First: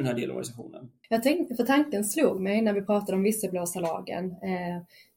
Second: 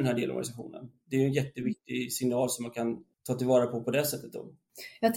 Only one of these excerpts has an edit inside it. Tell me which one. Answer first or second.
first